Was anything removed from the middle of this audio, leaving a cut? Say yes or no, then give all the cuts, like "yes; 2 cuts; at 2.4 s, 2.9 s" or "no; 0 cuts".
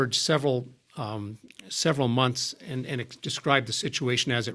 no; 0 cuts